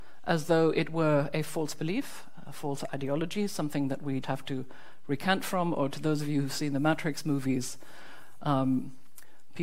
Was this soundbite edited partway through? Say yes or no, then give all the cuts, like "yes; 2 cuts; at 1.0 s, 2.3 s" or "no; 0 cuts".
yes; 1 cut; at 4.2 s